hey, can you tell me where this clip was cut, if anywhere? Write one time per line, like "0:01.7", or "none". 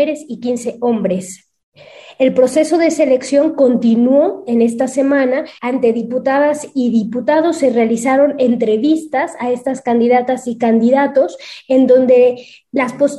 0:05.6